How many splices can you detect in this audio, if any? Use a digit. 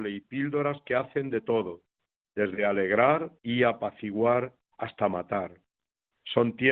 1